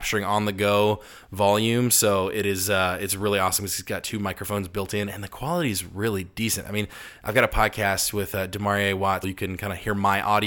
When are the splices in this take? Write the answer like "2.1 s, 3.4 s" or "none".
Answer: 9.2 s

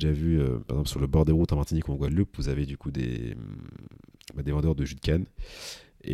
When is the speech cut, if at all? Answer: none

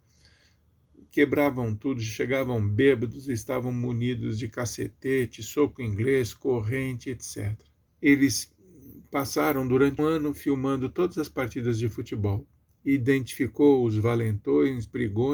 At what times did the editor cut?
7.9 s, 10.0 s

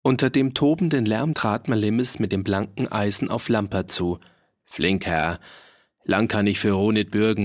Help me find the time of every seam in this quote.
1.3 s

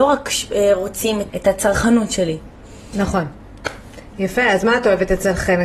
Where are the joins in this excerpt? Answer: 1.3 s

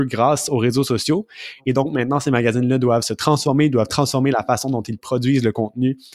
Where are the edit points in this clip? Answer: none

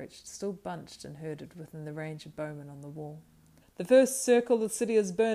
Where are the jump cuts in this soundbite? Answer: 3.6 s

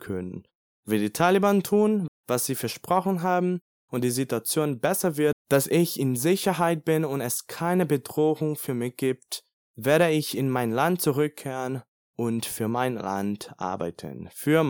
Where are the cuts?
2.1 s, 5.3 s

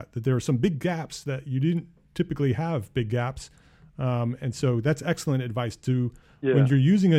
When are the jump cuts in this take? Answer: none

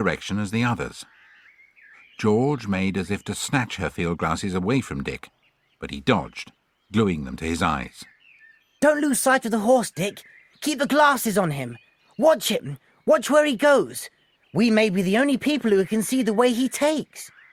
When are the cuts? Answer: none

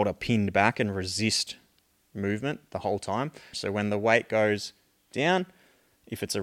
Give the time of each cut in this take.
3.5 s

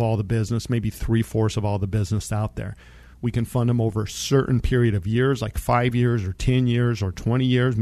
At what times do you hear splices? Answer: 3.1 s

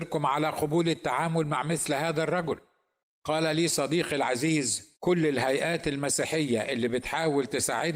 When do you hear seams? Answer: 5.0 s

